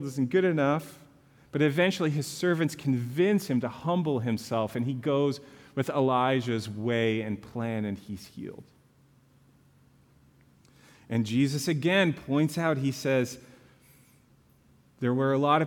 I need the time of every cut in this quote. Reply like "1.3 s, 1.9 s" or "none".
none